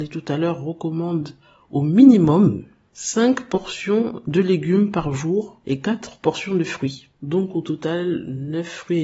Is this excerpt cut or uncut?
cut